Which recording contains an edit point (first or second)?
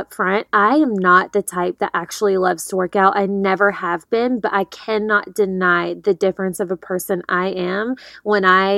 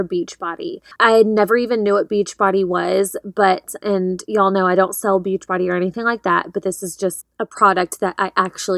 second